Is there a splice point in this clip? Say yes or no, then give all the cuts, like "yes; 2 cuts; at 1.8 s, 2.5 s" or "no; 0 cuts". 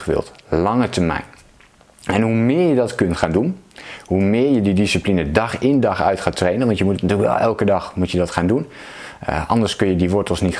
no; 0 cuts